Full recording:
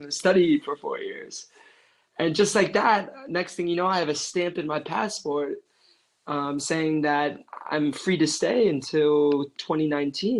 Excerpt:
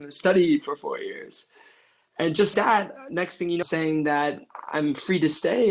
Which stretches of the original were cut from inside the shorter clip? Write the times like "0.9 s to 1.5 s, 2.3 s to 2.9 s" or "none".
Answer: 2.5 s to 2.7 s, 3.8 s to 6.6 s

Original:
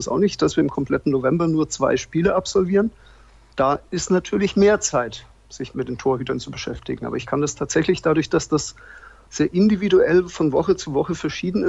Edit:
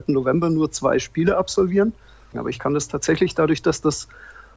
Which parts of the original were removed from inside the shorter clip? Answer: 3.3 s to 7.0 s

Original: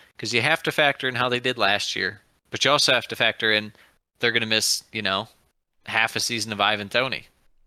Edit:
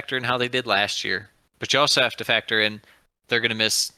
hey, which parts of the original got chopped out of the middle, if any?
none

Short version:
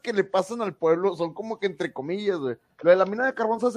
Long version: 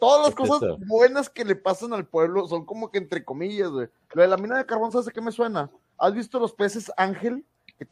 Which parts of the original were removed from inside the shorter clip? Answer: none

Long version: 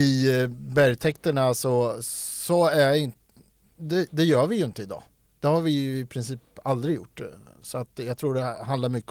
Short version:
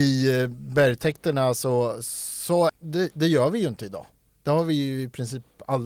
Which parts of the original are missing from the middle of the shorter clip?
2.7 s to 3.7 s

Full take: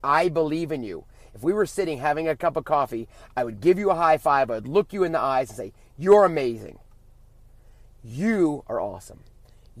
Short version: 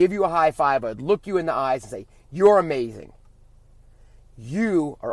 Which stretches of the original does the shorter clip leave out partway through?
none

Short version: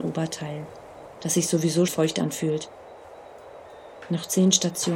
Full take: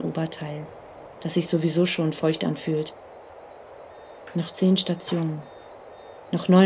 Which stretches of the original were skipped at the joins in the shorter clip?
1.9 s to 2.1 s

